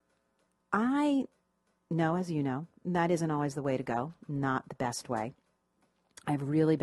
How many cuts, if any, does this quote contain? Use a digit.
0